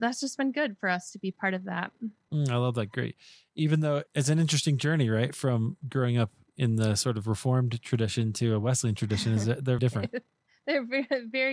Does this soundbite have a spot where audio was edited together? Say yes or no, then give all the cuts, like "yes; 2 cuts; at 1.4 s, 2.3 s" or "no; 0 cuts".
yes; 2 cuts; at 4.1 s, 9.8 s